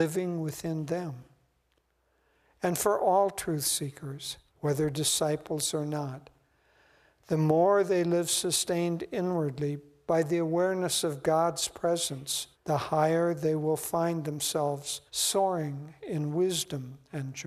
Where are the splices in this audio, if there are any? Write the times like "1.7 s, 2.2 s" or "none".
4.5 s, 12.5 s, 15.1 s